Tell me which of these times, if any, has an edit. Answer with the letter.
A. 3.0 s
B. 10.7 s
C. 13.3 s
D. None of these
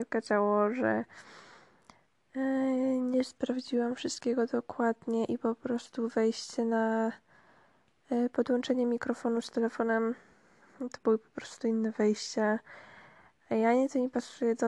D